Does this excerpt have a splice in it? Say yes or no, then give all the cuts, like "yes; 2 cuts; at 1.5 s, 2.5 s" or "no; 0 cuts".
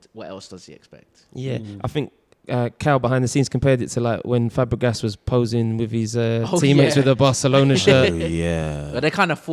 no; 0 cuts